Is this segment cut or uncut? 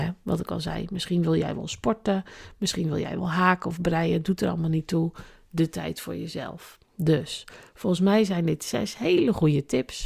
uncut